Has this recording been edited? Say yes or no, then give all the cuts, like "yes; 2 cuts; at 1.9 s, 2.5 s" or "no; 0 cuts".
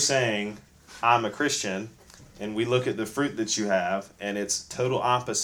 no; 0 cuts